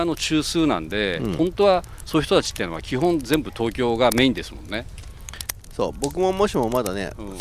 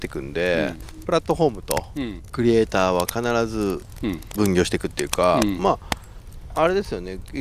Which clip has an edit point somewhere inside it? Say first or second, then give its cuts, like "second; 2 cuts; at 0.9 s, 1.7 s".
second; 1 cut; at 1.0 s